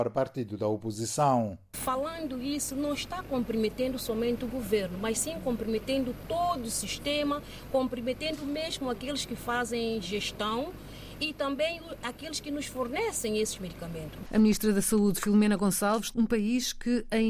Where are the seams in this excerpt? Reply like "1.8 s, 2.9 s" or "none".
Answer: 14.3 s, 16.1 s